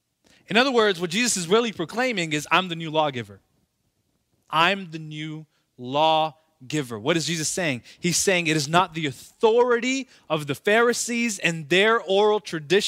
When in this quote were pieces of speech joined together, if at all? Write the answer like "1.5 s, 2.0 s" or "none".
4.5 s